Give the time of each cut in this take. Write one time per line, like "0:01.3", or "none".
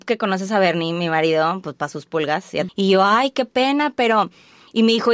0:02.7

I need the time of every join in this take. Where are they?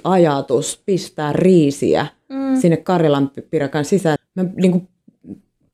0:04.2

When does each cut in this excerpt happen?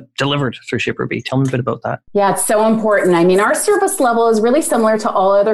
0:02.1

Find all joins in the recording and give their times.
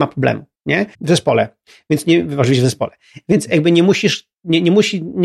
0:00.9

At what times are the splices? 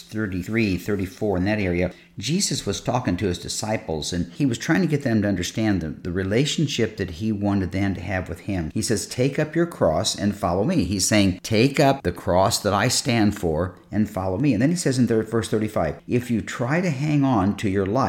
0:08.7

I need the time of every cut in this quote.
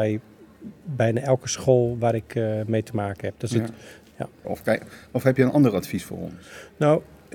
0:04.4

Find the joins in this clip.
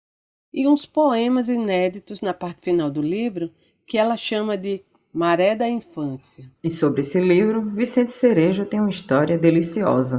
none

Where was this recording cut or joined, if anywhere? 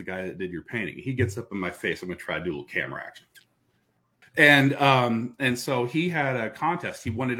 0:04.2

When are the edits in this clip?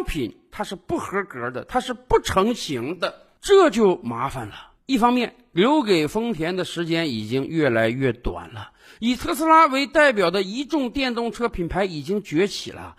none

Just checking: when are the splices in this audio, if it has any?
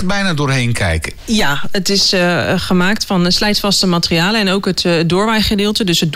none

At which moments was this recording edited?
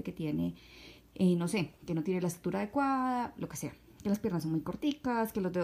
none

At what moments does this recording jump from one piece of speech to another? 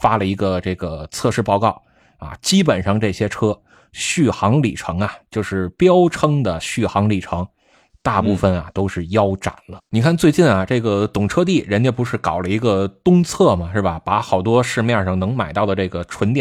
0:09.8

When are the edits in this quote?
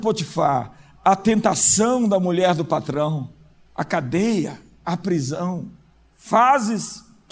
none

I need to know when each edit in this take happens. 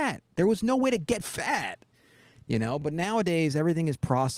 none

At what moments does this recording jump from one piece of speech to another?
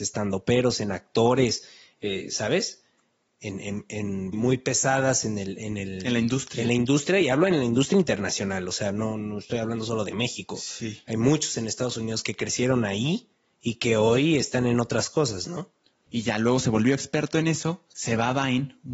0:04.3
0:16.1

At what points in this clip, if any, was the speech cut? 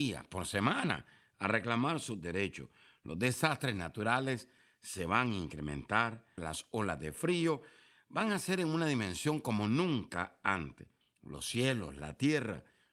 0:06.4
0:11.0

